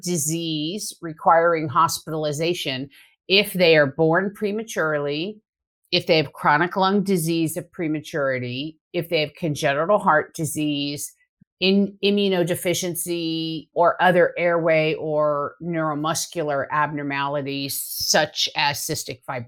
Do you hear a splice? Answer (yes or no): yes